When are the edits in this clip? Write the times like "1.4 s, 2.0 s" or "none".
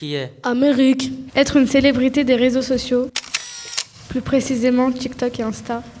1.3 s